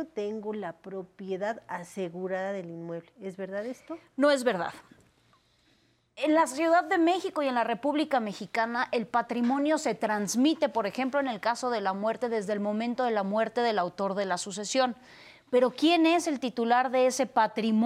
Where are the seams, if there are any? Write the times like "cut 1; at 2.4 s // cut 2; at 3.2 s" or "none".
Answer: none

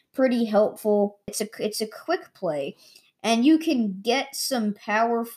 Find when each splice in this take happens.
cut 1; at 1.3 s

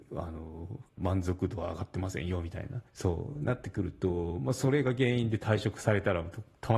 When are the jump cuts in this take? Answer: cut 1; at 1.0 s // cut 2; at 2.9 s

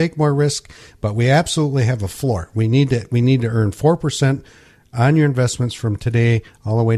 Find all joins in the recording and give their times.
none

